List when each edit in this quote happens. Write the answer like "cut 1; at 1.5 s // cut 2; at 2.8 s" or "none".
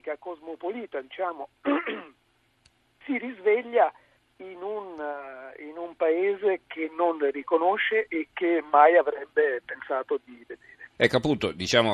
cut 1; at 11.0 s